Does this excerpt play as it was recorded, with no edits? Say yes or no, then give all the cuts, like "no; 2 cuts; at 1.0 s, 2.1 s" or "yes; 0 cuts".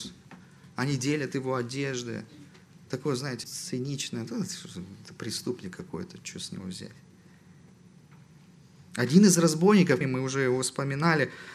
no; 2 cuts; at 3.4 s, 10.0 s